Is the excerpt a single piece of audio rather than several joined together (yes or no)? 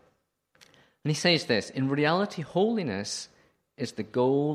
yes